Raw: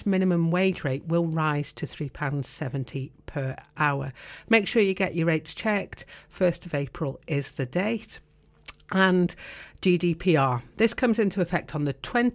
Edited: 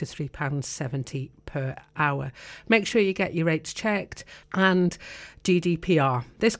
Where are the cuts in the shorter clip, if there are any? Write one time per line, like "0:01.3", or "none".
0:04.4